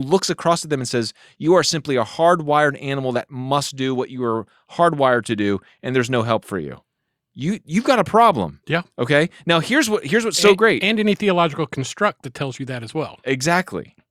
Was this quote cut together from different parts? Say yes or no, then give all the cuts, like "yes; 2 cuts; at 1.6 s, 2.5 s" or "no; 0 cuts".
no; 0 cuts